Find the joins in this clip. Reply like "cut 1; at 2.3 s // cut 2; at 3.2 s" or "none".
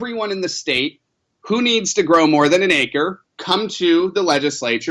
cut 1; at 3.2 s